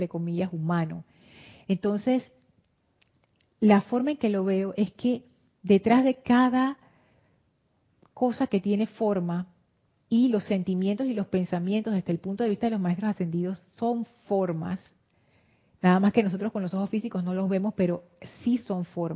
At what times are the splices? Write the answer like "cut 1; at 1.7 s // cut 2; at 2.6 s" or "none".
none